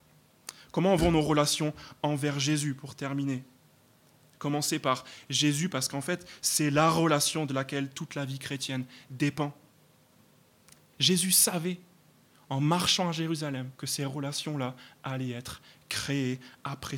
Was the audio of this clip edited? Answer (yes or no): yes